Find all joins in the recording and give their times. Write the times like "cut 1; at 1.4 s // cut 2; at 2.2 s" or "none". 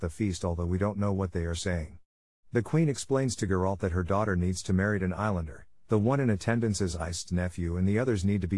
none